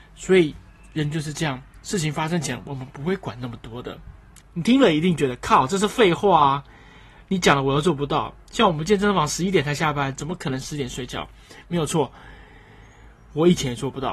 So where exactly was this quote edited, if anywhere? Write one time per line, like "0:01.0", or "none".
0:04.4